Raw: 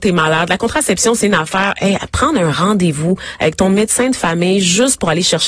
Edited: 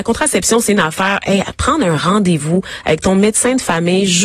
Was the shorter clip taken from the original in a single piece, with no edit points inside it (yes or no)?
yes